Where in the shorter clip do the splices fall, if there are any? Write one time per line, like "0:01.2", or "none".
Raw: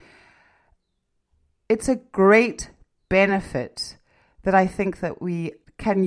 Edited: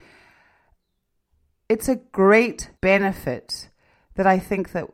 0:02.8